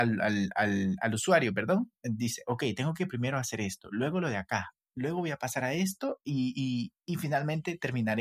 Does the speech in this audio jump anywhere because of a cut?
no; 0 cuts

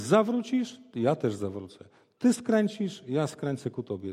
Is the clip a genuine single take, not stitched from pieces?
yes; 0 cuts

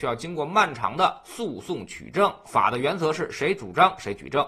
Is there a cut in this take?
yes; 1 cut; at 2.5 s

